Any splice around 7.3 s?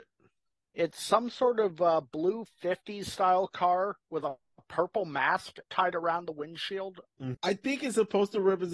yes; 1 cut; at 7.3 s

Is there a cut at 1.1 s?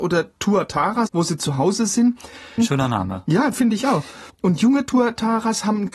yes; 3 cuts; at 1.1 s, 2.6 s, 4.3 s

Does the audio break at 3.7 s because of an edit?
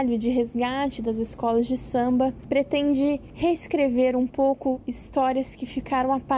no; 0 cuts

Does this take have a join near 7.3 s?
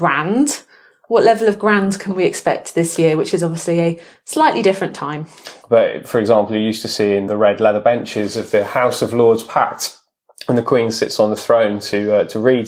yes; 2 cuts; at 5.6 s, 7.3 s

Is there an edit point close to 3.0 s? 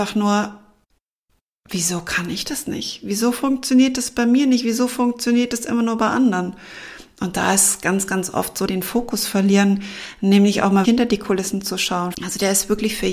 no; 3 cuts; at 8.7 s, 10.8 s, 12.1 s

